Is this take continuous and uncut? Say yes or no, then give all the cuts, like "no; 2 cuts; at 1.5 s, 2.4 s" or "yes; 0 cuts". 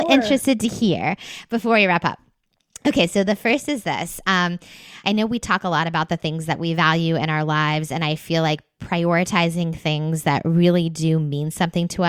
no; 1 cut; at 5.0 s